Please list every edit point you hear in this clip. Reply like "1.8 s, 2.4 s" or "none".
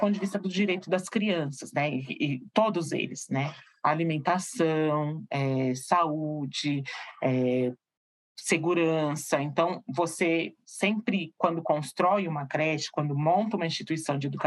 none